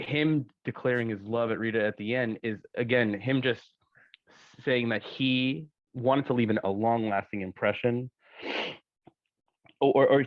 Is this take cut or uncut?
uncut